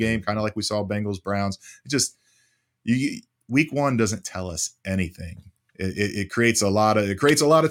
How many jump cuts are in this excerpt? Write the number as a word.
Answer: zero